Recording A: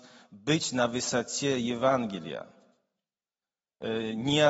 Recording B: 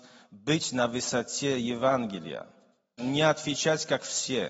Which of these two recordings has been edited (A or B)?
B